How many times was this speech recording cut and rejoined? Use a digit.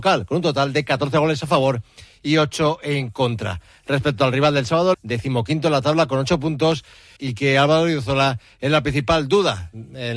2